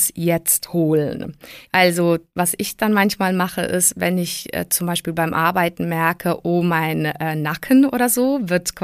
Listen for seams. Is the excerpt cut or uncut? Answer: cut